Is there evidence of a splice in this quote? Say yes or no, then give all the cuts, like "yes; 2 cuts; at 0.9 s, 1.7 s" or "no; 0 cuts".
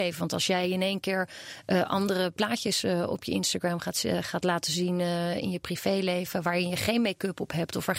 no; 0 cuts